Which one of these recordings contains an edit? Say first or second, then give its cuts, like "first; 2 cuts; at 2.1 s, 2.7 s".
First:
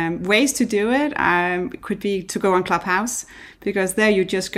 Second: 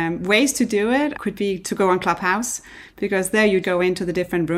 second; 2 cuts; at 1.1 s, 3.6 s